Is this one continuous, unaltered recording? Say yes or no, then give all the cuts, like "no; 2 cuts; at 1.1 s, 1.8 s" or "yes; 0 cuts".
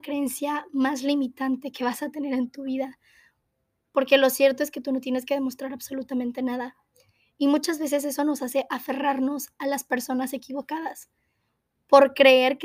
yes; 0 cuts